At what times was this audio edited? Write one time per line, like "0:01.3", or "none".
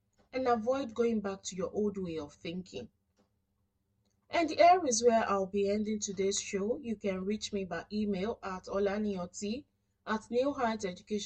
none